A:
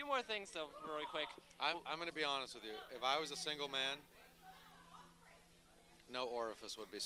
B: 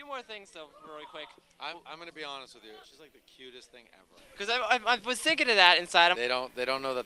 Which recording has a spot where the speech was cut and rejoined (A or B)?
B